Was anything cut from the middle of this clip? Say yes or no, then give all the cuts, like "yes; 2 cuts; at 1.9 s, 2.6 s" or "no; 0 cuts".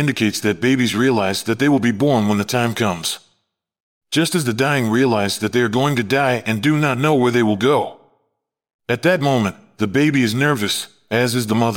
no; 0 cuts